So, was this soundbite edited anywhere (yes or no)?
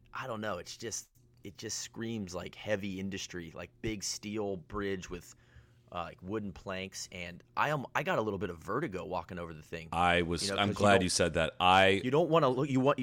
no